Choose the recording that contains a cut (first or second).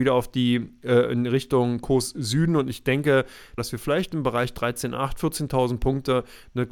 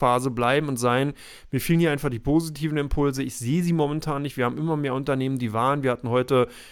first